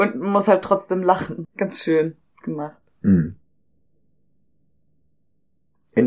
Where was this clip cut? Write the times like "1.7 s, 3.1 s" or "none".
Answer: 1.4 s